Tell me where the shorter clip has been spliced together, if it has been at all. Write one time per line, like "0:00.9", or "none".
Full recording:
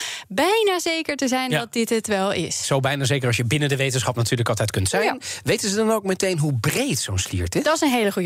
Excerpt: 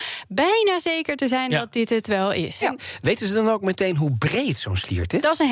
0:02.6